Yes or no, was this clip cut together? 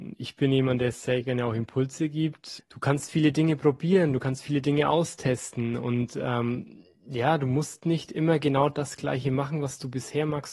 yes